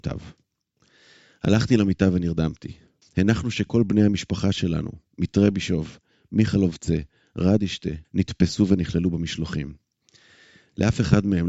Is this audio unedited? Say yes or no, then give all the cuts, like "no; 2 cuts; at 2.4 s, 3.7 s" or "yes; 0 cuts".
no; 2 cuts; at 3.0 s, 8.0 s